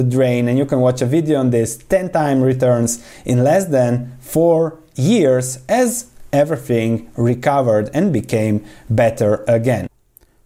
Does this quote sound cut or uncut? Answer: uncut